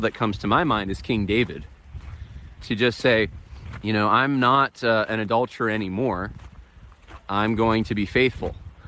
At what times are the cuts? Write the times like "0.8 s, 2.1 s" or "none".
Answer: 2.6 s, 3.8 s

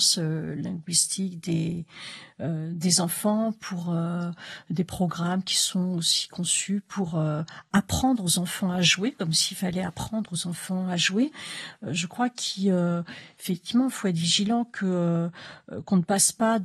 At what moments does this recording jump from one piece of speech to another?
none

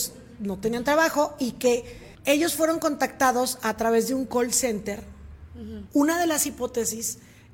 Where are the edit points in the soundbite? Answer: 2.1 s, 5.9 s

